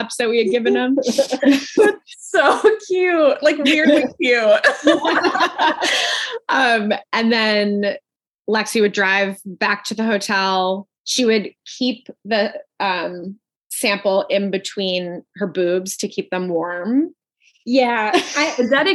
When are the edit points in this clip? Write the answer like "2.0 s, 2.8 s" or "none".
none